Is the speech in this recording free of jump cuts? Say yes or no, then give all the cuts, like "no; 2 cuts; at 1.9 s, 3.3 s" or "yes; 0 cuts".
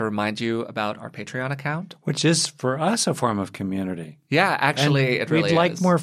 yes; 0 cuts